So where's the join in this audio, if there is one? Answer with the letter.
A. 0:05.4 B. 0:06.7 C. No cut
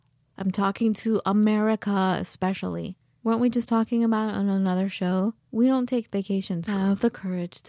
B